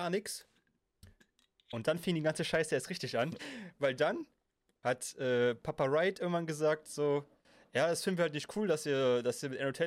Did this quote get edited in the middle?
yes; 1 cut; at 3.4 s

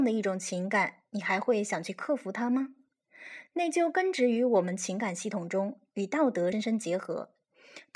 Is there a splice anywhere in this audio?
yes; 1 cut; at 6.5 s

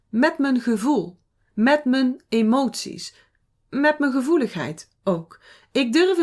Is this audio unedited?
yes; 0 cuts

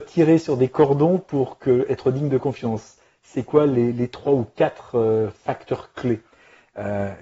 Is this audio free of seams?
yes; 0 cuts

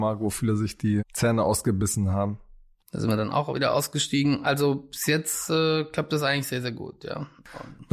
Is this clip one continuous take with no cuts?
no; 2 cuts; at 1.0 s, 2.8 s

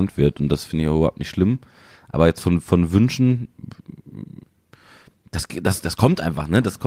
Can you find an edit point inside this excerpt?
no; 0 cuts

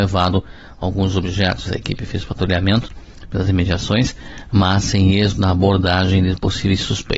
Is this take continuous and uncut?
no; 1 cut; at 1.7 s

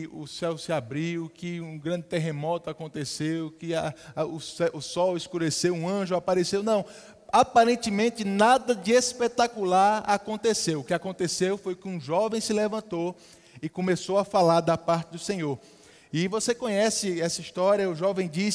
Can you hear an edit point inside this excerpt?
no; 0 cuts

